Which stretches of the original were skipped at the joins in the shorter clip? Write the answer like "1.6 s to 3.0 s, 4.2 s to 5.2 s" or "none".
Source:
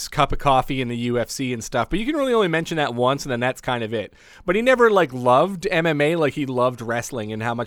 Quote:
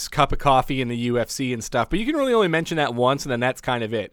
none